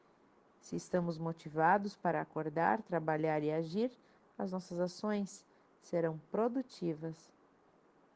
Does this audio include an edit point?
no; 0 cuts

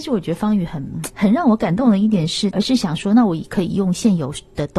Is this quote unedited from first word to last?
no; 2 cuts; at 1.1 s, 2.5 s

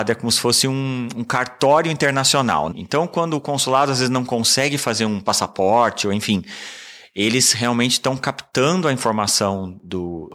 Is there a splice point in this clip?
yes; 1 cut; at 2.7 s

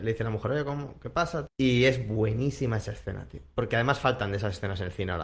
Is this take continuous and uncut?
no; 1 cut; at 1.5 s

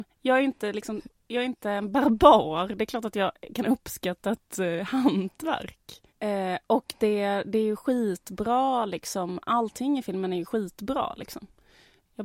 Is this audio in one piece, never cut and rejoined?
no; 1 cut; at 6.1 s

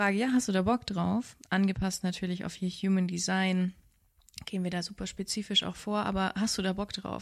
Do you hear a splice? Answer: no; 0 cuts

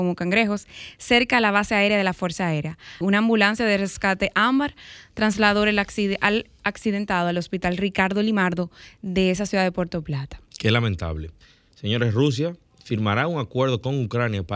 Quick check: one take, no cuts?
no; 1 cut; at 3.0 s

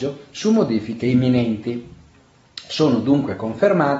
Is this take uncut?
yes; 0 cuts

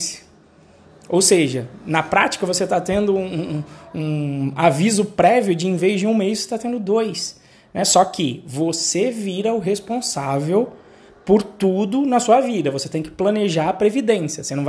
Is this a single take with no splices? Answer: yes; 0 cuts

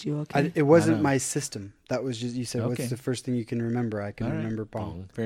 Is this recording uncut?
yes; 0 cuts

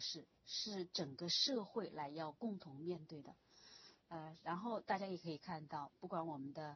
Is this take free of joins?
yes; 0 cuts

